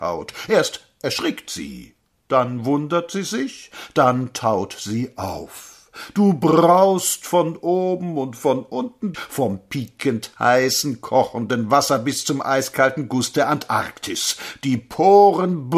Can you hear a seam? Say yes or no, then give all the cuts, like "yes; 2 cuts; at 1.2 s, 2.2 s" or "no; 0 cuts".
yes; 1 cut; at 9.1 s